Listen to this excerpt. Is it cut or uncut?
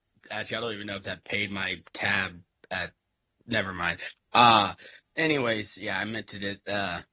uncut